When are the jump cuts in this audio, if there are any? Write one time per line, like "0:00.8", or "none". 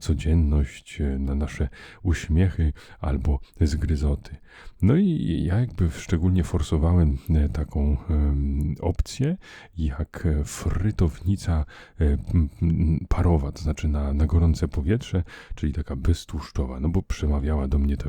none